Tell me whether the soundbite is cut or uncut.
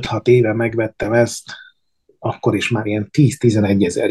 uncut